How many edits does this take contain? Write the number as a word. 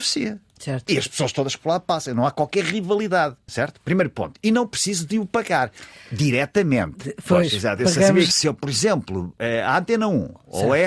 one